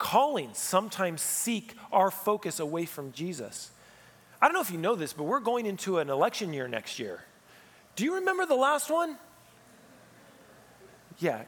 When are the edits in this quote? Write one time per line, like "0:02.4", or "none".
none